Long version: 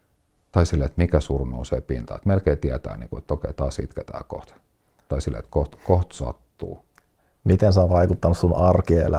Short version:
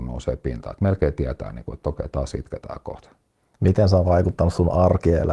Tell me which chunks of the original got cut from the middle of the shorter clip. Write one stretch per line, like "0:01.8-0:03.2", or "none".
0:05.0-0:07.4